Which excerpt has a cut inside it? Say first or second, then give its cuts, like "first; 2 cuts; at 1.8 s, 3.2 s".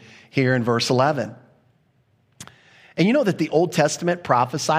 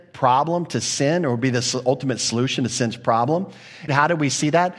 second; 1 cut; at 3.9 s